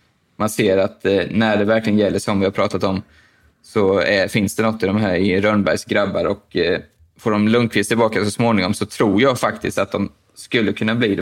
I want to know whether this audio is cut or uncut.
uncut